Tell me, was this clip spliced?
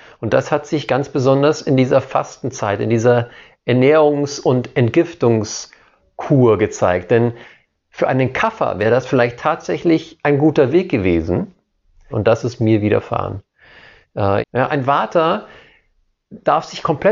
yes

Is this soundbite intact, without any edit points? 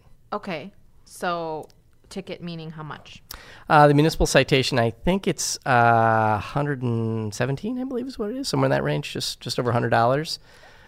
yes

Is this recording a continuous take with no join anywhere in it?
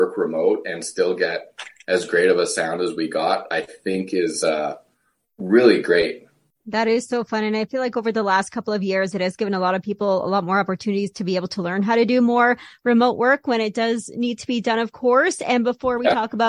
yes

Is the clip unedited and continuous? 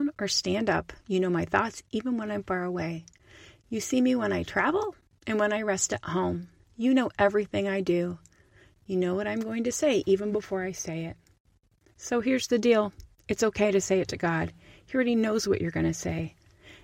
yes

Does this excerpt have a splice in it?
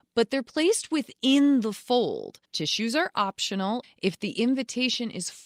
yes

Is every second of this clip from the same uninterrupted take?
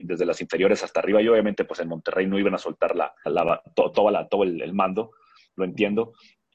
no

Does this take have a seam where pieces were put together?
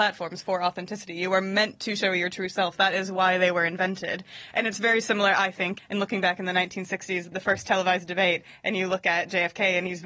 yes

